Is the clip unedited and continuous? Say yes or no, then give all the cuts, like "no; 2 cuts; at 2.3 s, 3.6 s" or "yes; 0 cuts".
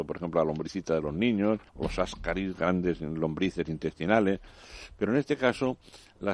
no; 1 cut; at 1.7 s